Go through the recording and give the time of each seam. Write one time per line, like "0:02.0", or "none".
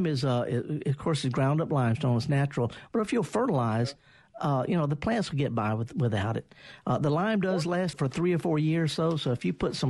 0:02.9
0:07.9